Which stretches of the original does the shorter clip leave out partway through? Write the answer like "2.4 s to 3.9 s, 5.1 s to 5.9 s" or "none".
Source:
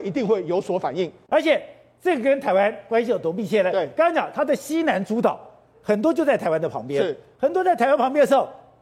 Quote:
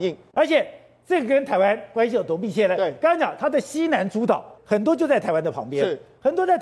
5.5 s to 5.8 s